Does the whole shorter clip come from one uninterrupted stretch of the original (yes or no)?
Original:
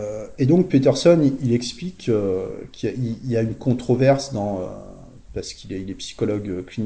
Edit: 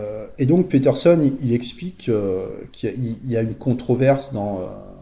yes